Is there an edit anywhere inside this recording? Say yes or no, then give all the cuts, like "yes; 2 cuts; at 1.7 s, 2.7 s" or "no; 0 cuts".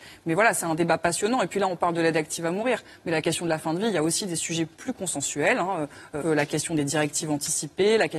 yes; 1 cut; at 6.2 s